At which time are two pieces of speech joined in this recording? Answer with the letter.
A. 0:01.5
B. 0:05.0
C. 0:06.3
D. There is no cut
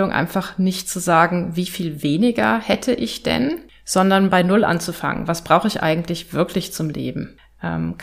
D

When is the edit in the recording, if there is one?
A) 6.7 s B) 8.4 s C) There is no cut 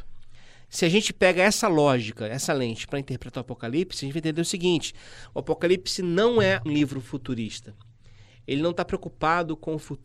A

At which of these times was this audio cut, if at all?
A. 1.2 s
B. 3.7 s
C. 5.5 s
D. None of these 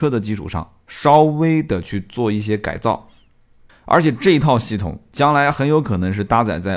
B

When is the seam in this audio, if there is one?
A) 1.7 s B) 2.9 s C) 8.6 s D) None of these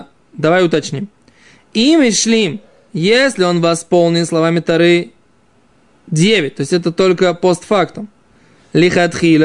D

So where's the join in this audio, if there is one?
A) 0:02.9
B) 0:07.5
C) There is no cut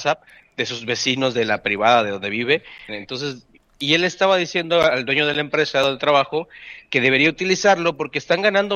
A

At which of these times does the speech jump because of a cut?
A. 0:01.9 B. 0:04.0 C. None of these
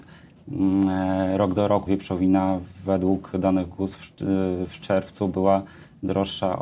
A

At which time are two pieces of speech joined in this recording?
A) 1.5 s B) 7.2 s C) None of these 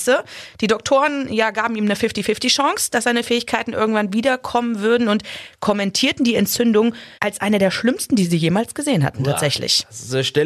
B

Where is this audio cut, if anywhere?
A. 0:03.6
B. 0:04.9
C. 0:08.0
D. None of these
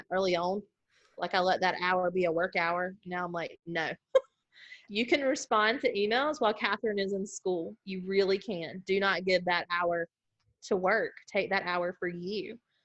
B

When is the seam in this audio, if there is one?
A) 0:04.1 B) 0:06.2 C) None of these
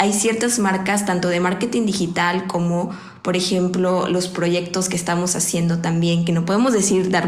C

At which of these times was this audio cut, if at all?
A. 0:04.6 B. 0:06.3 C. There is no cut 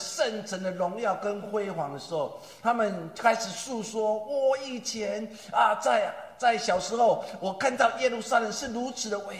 C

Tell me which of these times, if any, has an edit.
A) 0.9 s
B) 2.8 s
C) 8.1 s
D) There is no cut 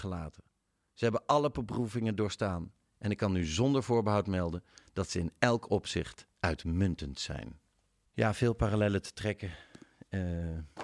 C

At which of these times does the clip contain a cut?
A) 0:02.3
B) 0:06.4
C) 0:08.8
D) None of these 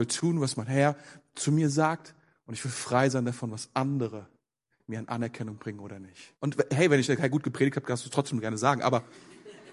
B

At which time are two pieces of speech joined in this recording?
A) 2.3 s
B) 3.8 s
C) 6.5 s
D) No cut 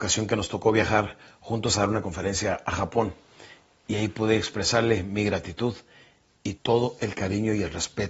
C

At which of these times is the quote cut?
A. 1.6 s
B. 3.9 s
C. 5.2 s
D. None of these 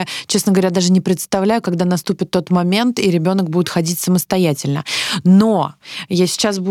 D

